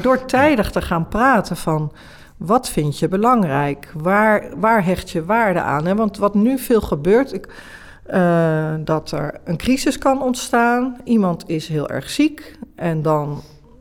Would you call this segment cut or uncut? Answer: uncut